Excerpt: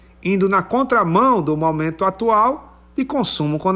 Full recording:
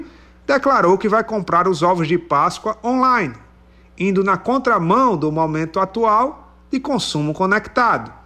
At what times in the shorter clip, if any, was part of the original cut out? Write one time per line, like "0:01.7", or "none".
none